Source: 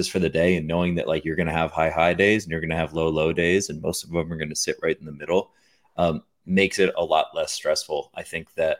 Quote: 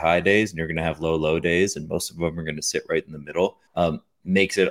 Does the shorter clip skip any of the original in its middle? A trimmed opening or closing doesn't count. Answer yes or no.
yes